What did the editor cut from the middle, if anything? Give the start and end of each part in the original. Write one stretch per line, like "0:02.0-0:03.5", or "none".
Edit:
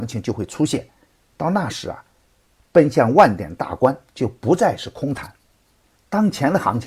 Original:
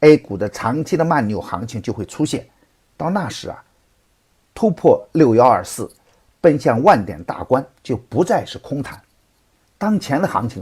0:04.2-0:06.3